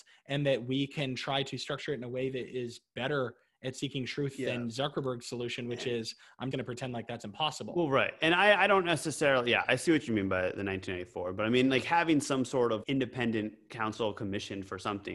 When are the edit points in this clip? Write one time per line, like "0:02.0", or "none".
0:06.5
0:12.8